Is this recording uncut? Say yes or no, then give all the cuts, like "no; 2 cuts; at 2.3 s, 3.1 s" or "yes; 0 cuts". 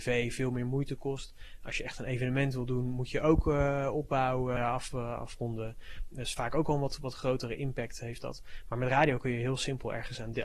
no; 1 cut; at 4.6 s